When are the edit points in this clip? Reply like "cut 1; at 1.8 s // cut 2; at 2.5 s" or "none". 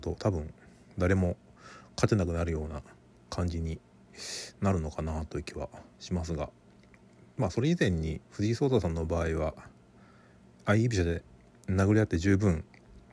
cut 1; at 8.3 s